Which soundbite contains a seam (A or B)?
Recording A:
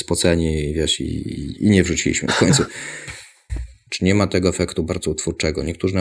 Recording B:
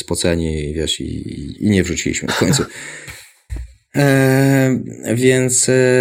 A